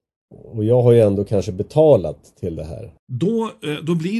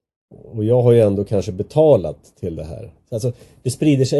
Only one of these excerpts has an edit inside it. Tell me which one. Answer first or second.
first